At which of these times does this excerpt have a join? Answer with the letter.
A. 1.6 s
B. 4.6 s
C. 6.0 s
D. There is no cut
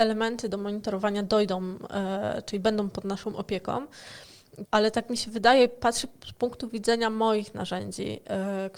B